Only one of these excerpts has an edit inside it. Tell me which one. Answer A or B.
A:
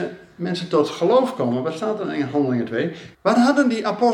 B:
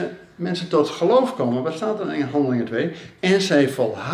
A